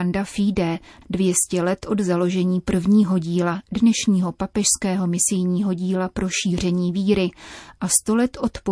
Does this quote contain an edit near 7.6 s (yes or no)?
no